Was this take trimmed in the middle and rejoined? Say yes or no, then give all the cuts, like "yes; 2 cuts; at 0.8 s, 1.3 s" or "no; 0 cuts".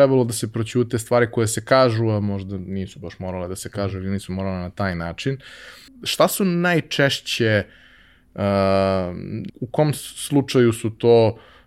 yes; 2 cuts; at 5.9 s, 9.5 s